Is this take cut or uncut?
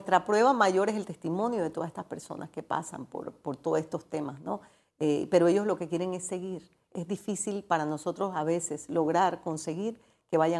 uncut